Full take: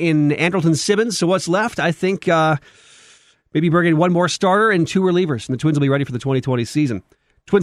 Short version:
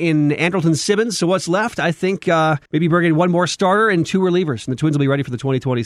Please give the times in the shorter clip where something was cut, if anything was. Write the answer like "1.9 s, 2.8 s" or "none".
2.7 s